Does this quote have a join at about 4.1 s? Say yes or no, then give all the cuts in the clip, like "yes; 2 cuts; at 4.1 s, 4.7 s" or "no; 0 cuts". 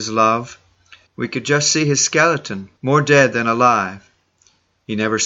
no; 2 cuts; at 1.1 s, 2.8 s